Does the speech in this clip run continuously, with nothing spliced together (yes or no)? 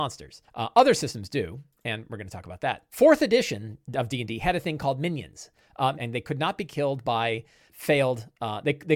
no